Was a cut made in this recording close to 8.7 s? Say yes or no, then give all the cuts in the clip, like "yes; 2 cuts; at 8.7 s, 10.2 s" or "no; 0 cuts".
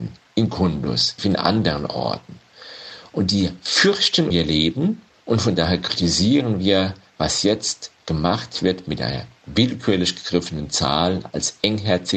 no; 2 cuts; at 1.2 s, 4.3 s